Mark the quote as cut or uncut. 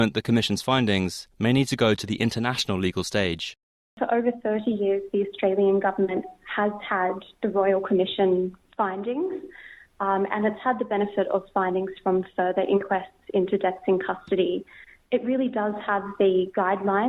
uncut